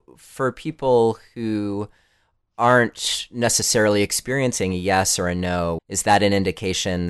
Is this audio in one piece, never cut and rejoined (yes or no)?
no